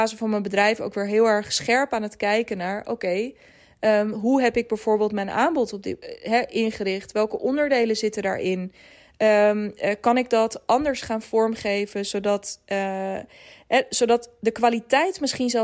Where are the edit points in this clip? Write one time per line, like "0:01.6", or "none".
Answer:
none